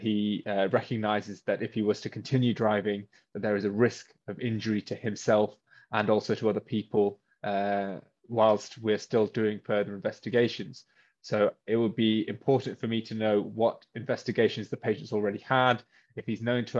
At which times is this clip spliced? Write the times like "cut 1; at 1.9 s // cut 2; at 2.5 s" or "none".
none

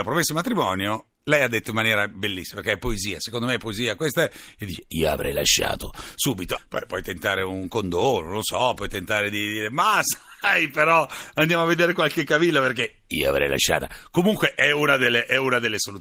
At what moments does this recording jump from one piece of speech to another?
cut 1; at 6.6 s

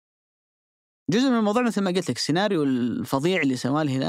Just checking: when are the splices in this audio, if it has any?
none

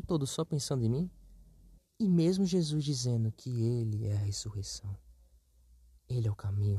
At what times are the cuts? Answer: cut 1; at 1.8 s

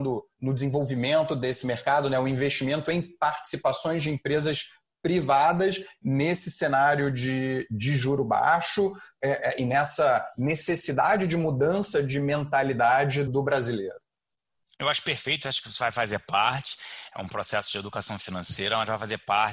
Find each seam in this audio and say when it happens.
cut 1; at 13.3 s

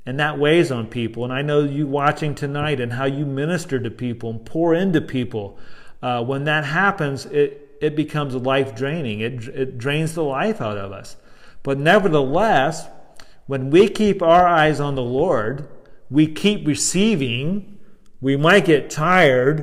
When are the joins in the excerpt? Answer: none

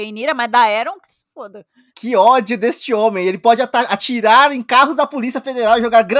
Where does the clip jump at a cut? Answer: cut 1; at 1.9 s

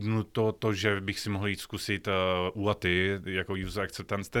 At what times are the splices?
none

